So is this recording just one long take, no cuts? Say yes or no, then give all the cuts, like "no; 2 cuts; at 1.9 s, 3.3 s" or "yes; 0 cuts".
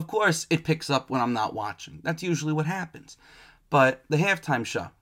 yes; 0 cuts